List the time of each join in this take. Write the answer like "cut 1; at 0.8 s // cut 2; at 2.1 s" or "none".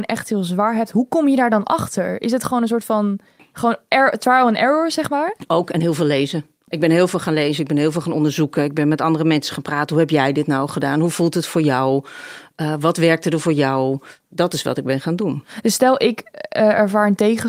none